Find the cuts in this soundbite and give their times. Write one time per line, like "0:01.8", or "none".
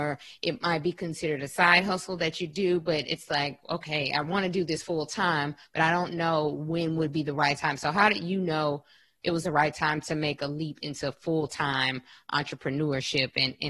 none